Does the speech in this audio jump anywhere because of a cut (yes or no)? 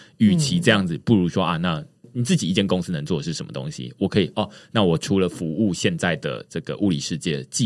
no